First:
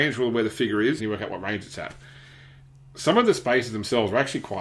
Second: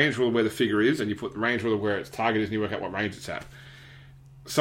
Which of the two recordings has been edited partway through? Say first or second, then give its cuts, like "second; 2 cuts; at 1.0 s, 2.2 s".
first; 1 cut; at 1.0 s